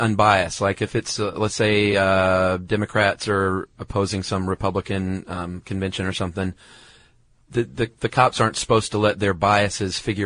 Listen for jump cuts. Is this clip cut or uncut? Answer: uncut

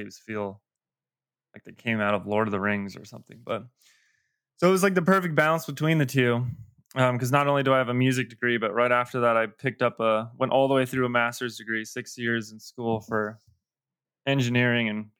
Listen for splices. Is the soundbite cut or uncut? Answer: uncut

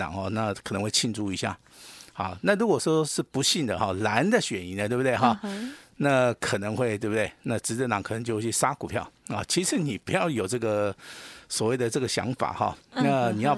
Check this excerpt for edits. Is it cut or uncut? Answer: uncut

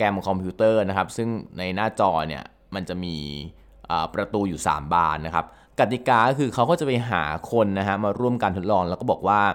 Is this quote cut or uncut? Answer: uncut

